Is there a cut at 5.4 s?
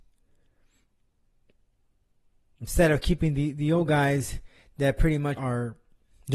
yes; 1 cut; at 5.4 s

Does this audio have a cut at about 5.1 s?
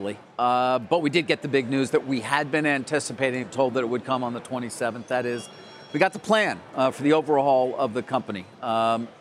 no; 1 cut; at 3.4 s

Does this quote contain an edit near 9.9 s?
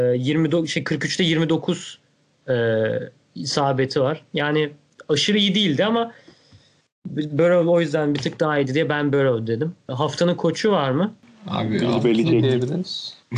yes; 1 cut; at 9.9 s

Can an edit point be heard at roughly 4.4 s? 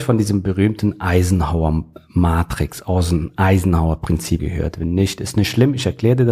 yes; 1 cut; at 4.4 s

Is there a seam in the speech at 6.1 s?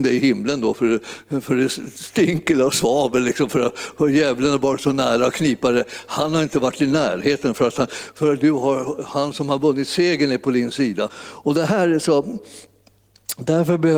no; 1 cut; at 11.1 s

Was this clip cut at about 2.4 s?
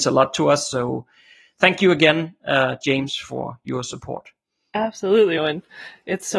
no; 1 cut; at 5.4 s

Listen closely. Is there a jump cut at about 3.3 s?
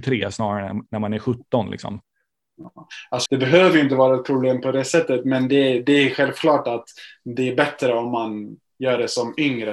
yes; 1 cut; at 3.3 s

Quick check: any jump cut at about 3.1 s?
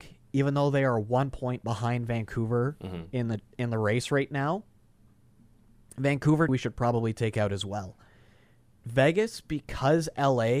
no; 1 cut; at 6.5 s

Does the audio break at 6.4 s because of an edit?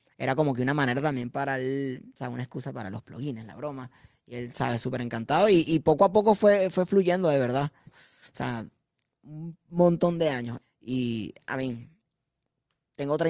no; 2 cuts; at 7.9 s, 10.6 s

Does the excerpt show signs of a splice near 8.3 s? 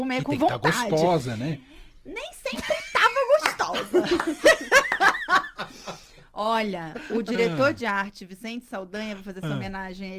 no; 0 cuts

